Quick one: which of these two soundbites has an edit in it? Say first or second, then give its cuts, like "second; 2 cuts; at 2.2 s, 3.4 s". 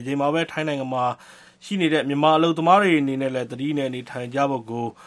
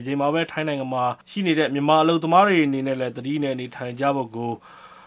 second; 1 cut; at 1.2 s